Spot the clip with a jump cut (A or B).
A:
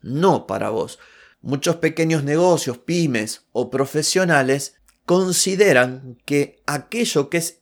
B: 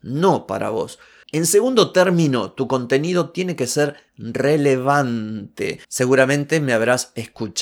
B